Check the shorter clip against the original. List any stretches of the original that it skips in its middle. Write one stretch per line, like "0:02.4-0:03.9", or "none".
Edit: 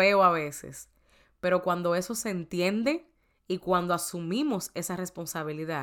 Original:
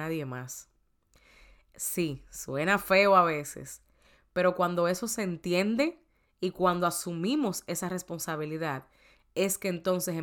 none